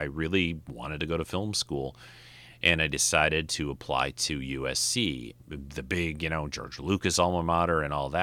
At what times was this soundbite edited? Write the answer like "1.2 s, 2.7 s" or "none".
5.4 s